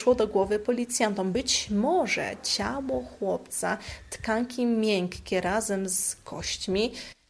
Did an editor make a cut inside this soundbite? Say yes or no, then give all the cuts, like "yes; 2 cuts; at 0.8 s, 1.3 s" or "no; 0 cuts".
no; 0 cuts